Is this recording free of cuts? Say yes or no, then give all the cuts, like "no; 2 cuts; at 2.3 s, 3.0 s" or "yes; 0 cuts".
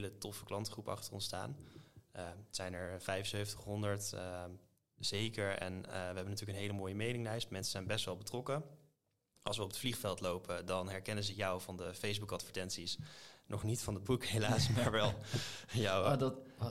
yes; 0 cuts